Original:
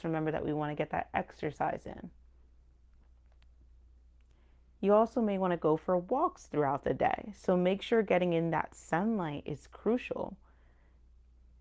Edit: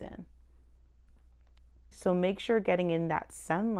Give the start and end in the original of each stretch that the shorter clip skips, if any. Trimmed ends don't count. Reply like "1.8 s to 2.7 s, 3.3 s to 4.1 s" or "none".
3.8 s to 7.3 s

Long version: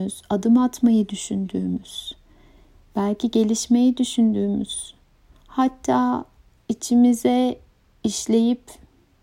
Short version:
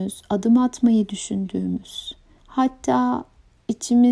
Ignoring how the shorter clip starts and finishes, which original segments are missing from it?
2.4 s to 5.4 s

